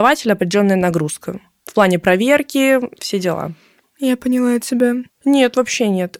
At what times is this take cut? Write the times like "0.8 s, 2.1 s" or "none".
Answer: 3.8 s, 5.1 s